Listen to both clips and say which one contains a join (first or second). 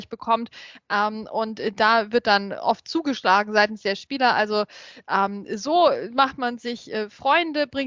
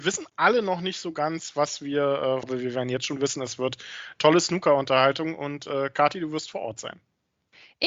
second